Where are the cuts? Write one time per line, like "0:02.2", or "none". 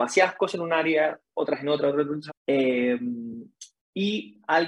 0:02.3